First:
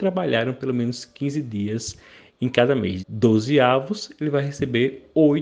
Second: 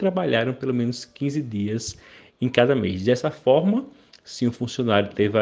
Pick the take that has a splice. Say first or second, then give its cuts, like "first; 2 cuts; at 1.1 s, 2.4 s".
first; 1 cut; at 3.0 s